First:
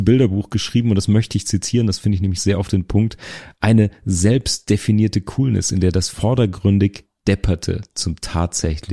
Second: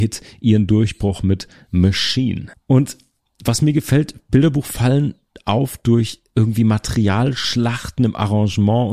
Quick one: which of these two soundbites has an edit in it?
second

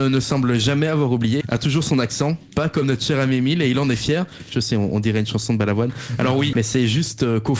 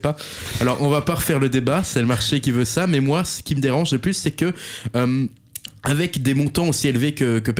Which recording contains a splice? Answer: first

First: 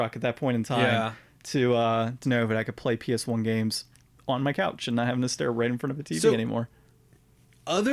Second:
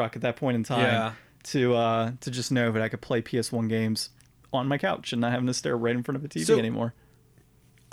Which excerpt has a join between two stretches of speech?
first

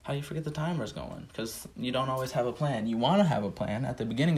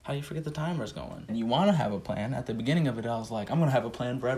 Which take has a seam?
second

